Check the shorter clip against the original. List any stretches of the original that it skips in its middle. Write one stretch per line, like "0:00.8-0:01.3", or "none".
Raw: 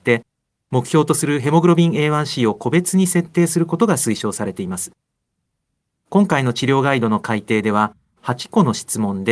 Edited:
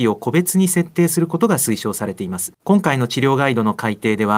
0:04.9-0:06.0